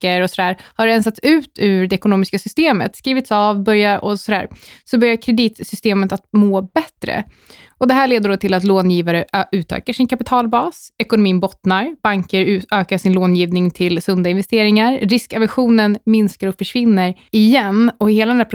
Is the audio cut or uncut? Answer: uncut